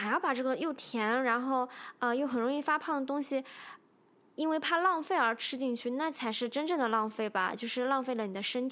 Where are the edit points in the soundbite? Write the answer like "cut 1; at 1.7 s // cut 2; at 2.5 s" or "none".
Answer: none